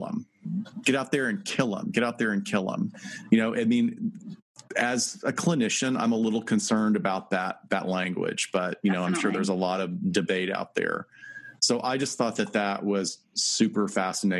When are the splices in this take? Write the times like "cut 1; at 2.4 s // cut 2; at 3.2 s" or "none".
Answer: none